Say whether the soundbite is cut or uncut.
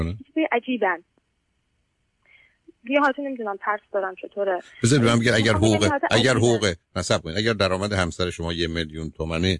uncut